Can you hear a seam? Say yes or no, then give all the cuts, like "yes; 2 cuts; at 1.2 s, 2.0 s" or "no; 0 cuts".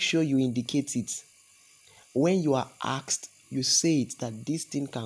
yes; 1 cut; at 3.4 s